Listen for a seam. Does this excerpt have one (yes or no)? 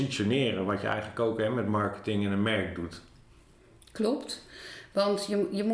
no